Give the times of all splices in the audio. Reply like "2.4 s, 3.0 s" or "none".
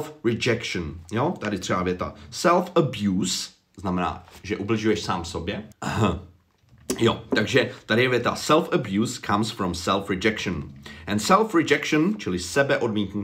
5.7 s

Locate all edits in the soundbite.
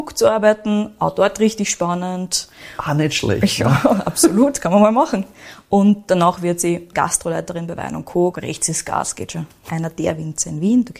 8.3 s, 9.7 s

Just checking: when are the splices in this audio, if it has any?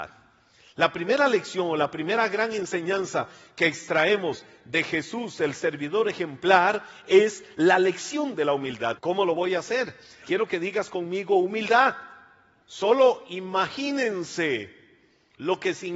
9.0 s, 10.2 s, 12.6 s

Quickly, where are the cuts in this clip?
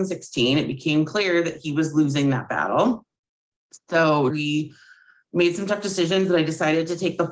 4.3 s

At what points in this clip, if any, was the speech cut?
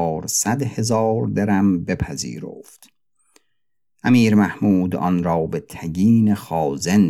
none

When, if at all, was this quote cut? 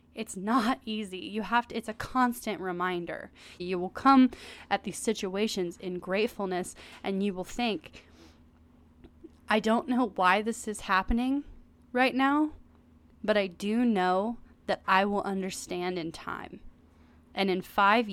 3.6 s

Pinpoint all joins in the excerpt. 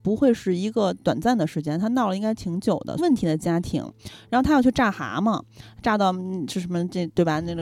3.0 s

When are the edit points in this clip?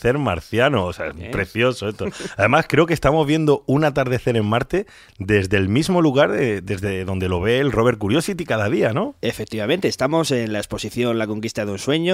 none

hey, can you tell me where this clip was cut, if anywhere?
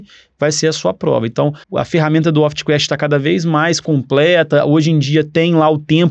1.6 s

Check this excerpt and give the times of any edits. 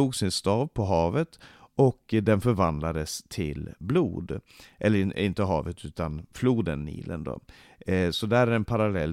none

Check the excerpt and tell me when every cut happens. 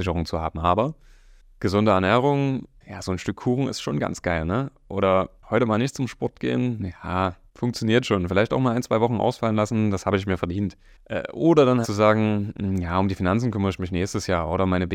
11.8 s

